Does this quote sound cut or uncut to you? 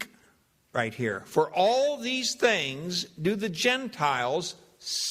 uncut